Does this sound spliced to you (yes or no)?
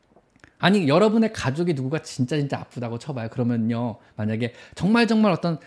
no